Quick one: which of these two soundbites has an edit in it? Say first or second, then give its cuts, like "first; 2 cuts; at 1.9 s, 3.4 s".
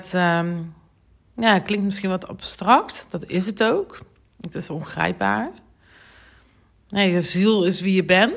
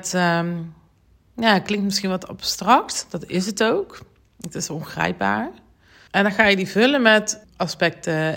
second; 2 cuts; at 6.1 s, 7.4 s